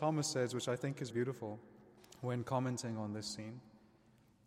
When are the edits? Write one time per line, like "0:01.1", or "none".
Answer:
0:01.1